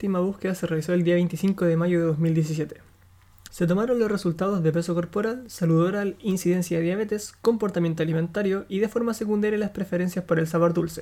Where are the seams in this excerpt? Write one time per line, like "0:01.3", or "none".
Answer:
0:03.5